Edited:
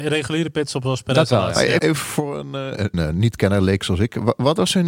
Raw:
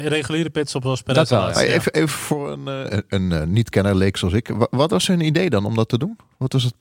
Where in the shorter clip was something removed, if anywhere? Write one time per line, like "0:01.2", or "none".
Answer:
0:01.8
0:02.9